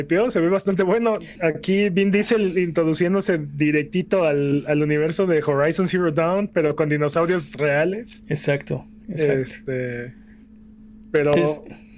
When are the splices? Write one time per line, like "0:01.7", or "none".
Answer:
0:01.4